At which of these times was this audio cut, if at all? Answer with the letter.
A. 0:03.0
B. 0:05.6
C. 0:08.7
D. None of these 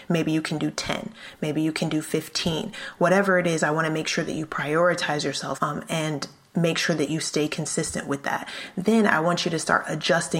B